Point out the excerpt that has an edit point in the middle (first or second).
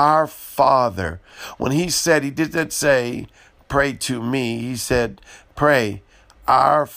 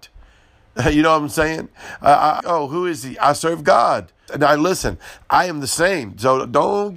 second